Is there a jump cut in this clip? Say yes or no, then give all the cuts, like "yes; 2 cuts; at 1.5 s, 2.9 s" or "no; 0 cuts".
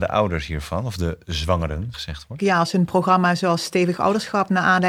yes; 1 cut; at 1.9 s